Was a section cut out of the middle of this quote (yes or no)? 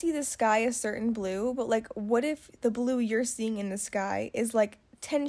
no